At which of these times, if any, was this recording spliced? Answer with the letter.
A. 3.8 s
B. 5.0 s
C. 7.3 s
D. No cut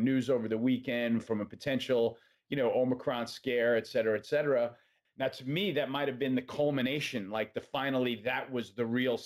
B